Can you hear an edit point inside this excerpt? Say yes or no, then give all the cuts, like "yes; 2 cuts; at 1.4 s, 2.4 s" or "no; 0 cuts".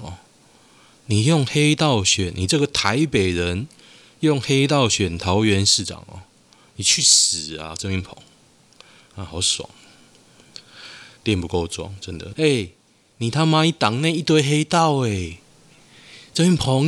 yes; 2 cuts; at 11.2 s, 12.3 s